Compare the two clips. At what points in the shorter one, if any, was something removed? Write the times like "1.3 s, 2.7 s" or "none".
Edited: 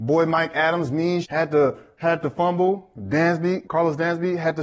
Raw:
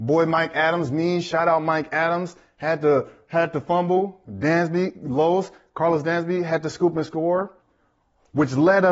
1.2 s, 3.6 s